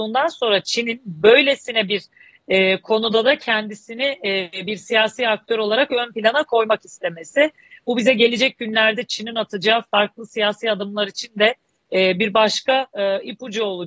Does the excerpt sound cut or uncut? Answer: uncut